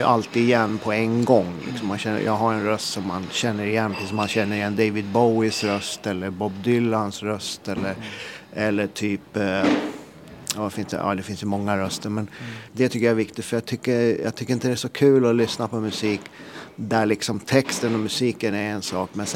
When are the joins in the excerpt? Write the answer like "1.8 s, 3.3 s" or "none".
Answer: 12.7 s